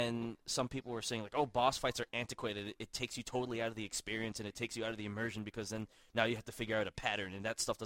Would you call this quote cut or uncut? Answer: uncut